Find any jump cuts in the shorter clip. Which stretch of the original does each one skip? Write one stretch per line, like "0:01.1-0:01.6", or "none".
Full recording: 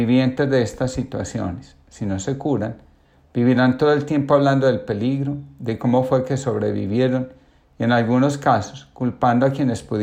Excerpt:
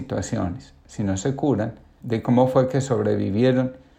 0:03.0-0:05.6